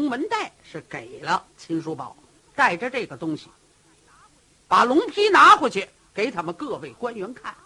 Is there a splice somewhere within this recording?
no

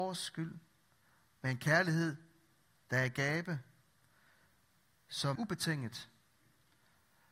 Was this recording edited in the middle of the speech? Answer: yes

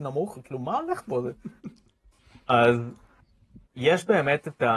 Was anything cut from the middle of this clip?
yes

